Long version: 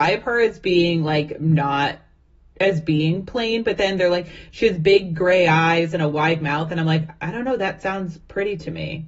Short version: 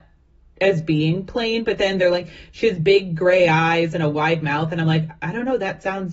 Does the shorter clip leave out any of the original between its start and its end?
no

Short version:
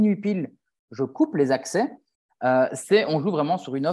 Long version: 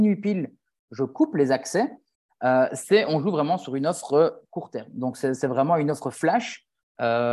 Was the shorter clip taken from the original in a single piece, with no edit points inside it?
yes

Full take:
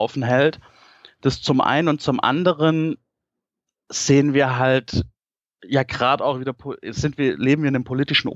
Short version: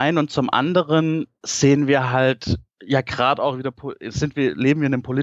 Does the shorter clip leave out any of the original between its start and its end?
yes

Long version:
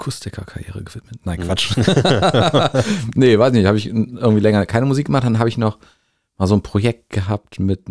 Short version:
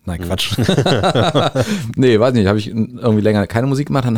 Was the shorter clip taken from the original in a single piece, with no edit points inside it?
yes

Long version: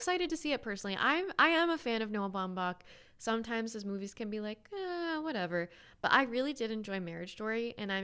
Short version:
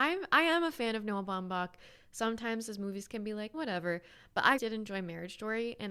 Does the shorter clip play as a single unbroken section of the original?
no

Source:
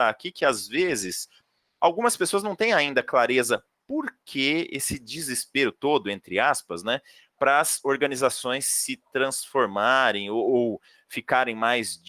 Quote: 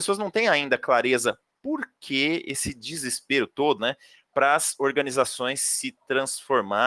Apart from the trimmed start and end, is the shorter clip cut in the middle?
yes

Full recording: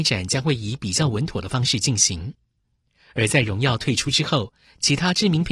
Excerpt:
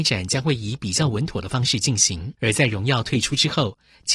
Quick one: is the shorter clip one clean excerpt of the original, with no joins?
no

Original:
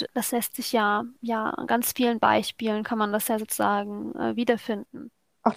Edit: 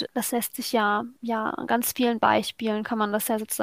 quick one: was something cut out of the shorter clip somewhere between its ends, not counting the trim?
no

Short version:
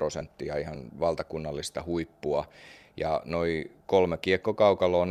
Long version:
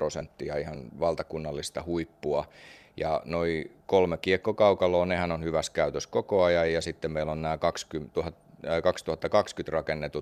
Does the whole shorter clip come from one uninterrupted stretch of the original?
yes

